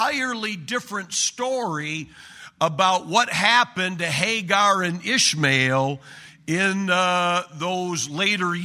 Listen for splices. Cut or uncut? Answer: uncut